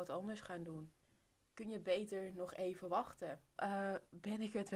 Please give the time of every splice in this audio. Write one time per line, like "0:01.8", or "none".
0:03.6